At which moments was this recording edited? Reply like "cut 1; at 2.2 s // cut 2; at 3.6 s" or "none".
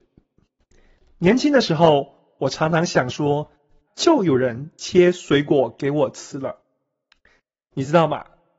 cut 1; at 3.9 s

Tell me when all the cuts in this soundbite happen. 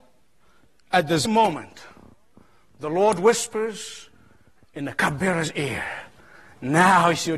cut 1; at 1.3 s

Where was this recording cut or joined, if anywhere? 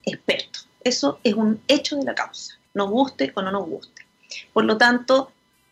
cut 1; at 2.6 s

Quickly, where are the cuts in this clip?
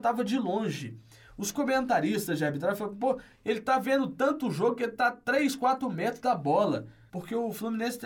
cut 1; at 7.1 s

